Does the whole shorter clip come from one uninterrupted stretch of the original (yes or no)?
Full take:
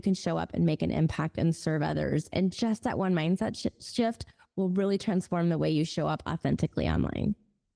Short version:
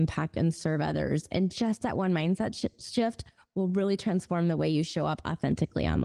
yes